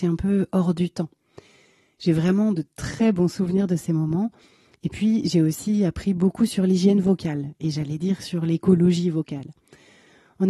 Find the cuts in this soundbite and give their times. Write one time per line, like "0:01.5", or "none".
none